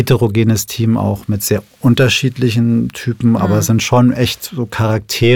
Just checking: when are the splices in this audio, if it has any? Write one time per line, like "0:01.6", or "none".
0:03.4